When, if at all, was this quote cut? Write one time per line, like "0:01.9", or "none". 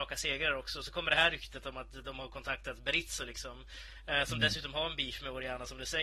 none

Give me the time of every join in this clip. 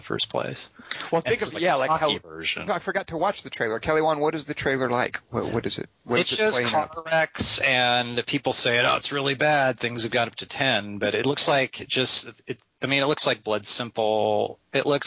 0:02.7

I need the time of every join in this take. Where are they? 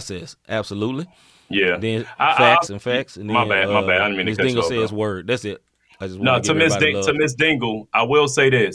0:02.7

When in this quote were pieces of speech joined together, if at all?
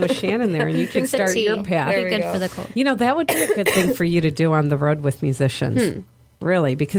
none

